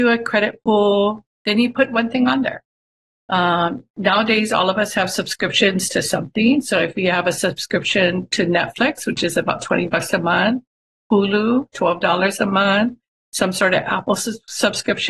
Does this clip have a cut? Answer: yes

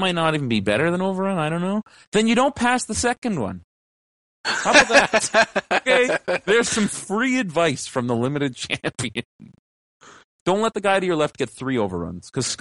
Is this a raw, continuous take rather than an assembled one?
yes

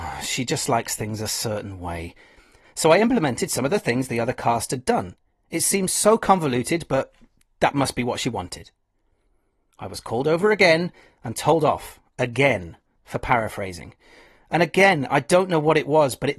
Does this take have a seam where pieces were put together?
yes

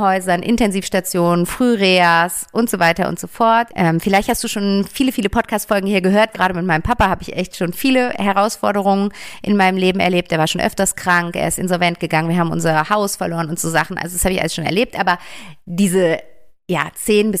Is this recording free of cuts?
no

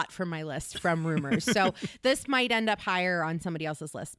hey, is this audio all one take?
yes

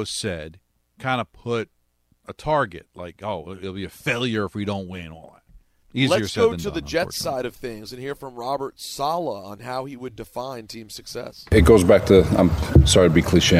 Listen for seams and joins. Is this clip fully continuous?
no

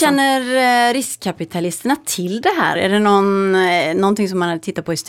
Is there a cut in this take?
yes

